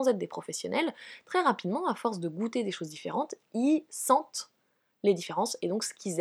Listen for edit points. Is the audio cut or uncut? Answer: uncut